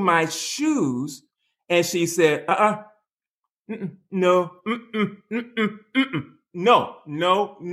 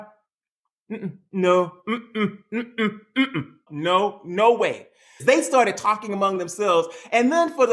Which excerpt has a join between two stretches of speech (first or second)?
second